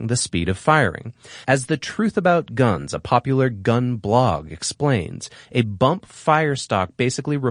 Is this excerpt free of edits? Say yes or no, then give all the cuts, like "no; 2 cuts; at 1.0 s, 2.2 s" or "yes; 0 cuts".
no; 1 cut; at 1.4 s